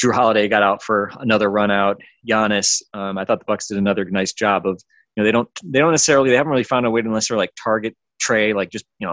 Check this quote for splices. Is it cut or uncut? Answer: uncut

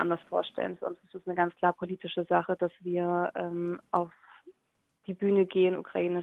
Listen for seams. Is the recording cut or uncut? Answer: uncut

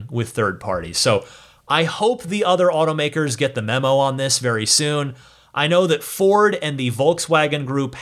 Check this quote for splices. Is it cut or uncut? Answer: uncut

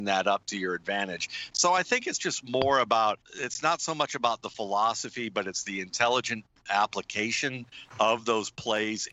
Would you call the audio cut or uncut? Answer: cut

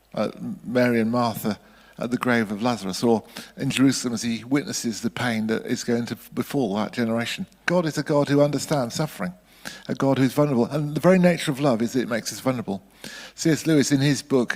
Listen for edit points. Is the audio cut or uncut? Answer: cut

